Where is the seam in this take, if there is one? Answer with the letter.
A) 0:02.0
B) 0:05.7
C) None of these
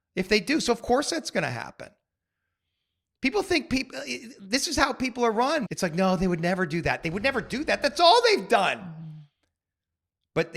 B